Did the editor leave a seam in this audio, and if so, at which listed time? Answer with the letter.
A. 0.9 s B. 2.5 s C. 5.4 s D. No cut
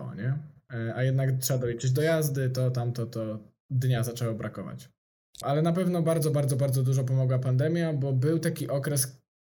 C